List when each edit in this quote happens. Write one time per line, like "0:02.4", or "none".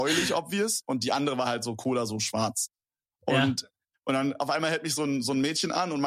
0:03.9